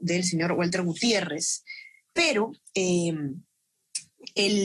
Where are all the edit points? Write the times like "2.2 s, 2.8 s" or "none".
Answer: none